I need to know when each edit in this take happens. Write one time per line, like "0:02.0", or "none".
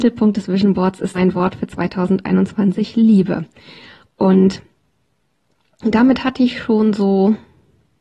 0:01.1